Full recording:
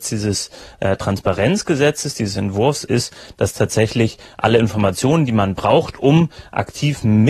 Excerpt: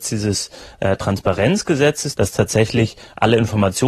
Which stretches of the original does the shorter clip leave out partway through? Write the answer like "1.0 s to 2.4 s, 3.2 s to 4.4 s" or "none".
2.1 s to 3.3 s